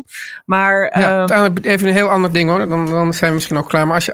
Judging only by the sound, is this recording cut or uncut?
cut